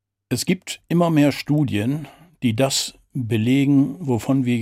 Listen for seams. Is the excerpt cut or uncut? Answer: uncut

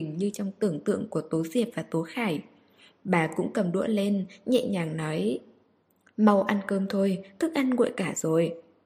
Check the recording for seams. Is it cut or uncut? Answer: uncut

